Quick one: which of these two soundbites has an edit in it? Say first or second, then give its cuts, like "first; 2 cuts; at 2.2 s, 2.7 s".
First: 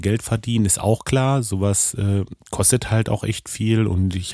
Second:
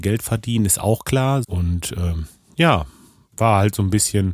second; 1 cut; at 1.4 s